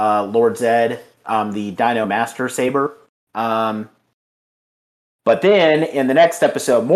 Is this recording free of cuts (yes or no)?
no